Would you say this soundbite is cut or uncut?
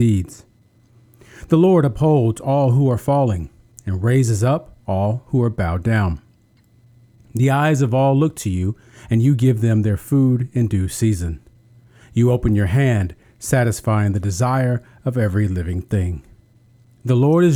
uncut